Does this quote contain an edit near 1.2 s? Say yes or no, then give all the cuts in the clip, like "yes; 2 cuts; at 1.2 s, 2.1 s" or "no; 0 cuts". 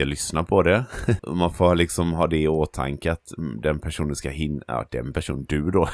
yes; 1 cut; at 1.2 s